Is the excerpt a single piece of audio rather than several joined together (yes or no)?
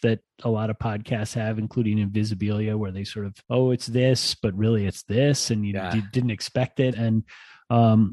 no